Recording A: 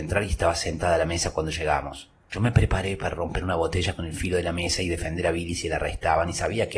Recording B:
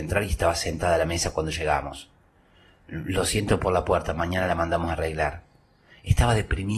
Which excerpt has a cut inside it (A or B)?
A